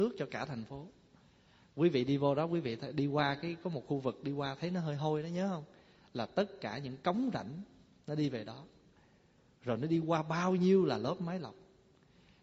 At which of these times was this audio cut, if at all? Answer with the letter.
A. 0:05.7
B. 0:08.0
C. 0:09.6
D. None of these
D